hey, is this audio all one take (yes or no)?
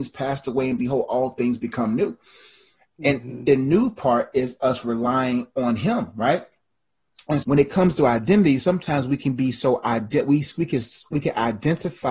no